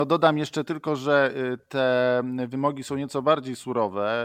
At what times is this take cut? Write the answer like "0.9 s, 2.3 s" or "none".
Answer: 1.6 s